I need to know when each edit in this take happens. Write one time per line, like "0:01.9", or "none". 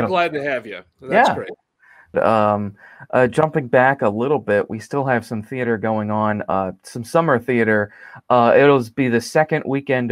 0:02.1